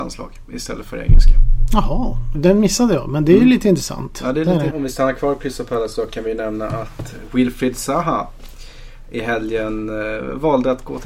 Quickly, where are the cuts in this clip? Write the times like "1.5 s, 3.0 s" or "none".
2.3 s, 4.7 s